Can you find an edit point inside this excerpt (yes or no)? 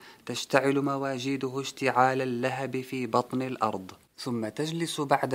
yes